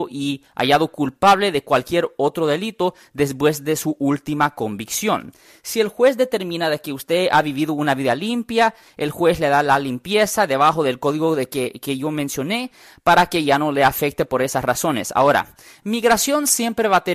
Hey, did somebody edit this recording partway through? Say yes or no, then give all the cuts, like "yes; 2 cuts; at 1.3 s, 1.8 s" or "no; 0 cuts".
no; 0 cuts